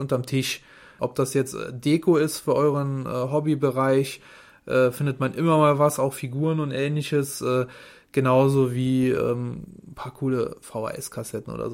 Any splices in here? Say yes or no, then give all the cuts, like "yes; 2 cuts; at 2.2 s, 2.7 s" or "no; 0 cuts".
yes; 1 cut; at 1.0 s